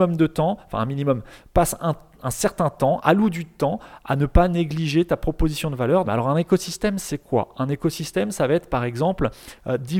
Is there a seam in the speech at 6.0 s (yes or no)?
yes